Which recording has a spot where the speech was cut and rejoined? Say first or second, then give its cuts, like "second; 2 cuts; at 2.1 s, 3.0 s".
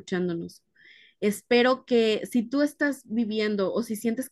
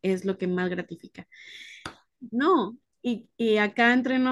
second; 1 cut; at 2.3 s